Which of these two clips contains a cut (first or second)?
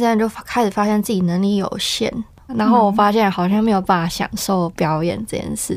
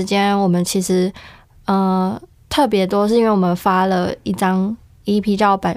first